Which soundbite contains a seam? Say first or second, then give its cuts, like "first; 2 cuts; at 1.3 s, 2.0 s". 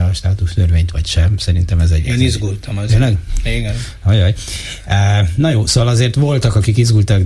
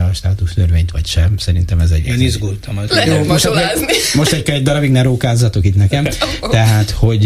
second; 1 cut; at 2.9 s